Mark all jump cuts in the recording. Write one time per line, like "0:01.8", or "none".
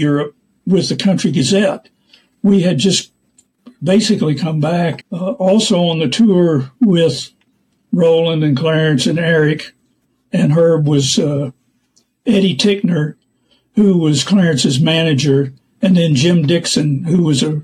0:05.0